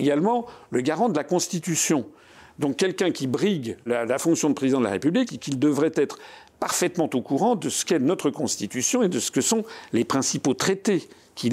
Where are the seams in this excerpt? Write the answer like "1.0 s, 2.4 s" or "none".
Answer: 3.9 s, 5.3 s